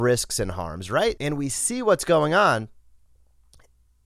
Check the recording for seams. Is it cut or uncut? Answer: cut